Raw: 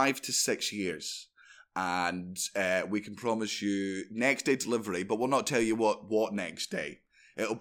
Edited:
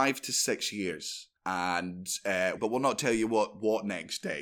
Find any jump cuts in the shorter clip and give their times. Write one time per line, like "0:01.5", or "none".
0:01.4
0:02.6